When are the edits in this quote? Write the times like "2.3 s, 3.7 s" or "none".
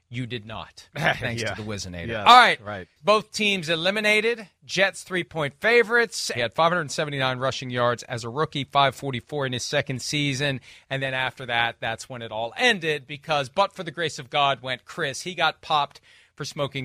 3.0 s, 6.3 s